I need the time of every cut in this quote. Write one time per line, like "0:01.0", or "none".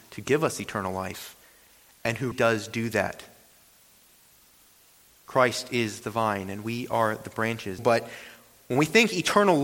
0:02.3
0:07.8